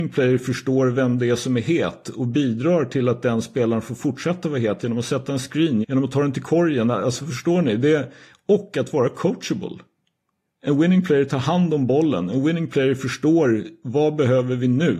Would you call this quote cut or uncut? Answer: cut